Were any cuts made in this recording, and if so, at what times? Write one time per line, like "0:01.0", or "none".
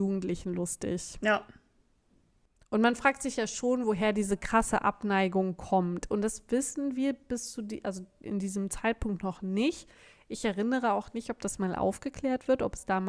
none